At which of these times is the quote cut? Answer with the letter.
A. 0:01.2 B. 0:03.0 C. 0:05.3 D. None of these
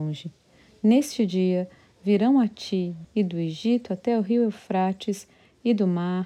B